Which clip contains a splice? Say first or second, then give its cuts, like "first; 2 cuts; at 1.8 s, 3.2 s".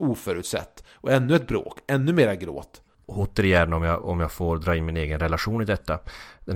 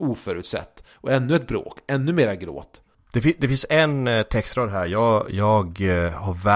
first; 1 cut; at 3.0 s